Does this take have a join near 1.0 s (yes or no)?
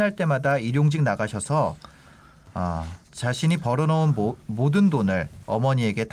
no